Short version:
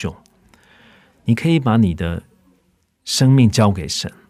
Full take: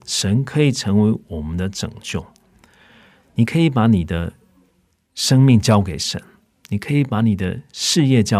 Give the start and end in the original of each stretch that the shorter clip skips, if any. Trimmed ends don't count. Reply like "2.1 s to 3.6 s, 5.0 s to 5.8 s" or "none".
none